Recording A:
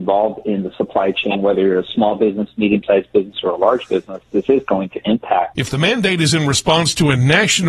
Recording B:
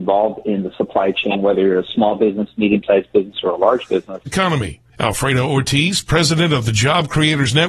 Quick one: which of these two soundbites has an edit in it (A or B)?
B